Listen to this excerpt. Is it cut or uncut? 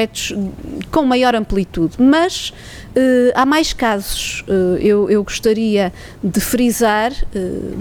uncut